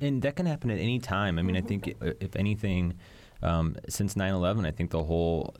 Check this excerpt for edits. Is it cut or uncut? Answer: cut